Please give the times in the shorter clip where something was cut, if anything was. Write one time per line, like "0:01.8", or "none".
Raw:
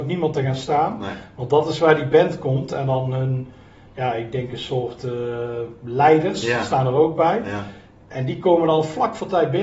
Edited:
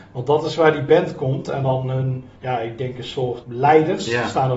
0:02.4
0:03.4